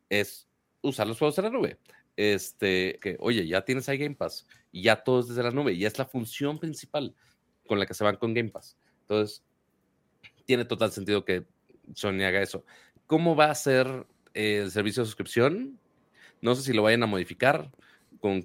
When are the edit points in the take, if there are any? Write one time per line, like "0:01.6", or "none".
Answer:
0:03.0